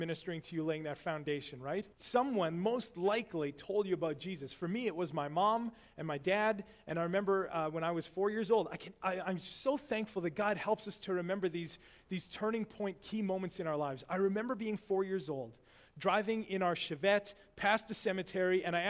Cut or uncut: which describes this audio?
cut